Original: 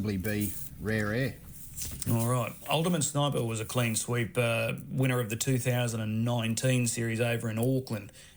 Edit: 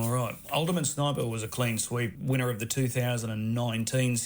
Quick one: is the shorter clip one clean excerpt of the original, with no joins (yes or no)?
no